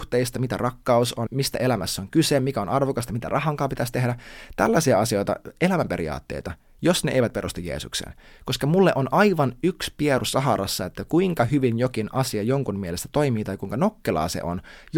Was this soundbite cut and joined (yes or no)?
yes